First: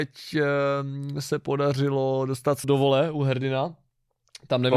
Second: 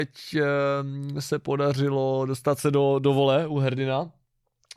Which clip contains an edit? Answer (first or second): first